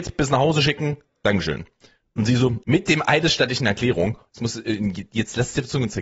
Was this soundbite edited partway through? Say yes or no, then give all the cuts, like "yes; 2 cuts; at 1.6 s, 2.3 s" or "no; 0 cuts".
yes; 1 cut; at 2.6 s